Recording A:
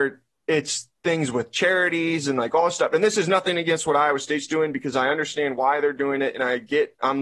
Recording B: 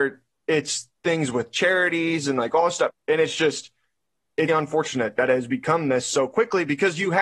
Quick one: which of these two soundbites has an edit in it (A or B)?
B